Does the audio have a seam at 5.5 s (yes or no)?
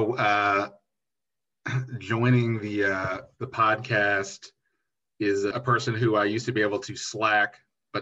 yes